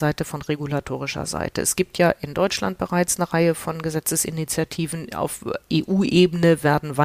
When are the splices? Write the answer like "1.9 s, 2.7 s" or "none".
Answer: none